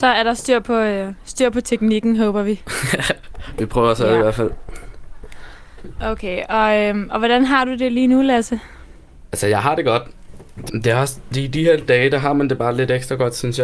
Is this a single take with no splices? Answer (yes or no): no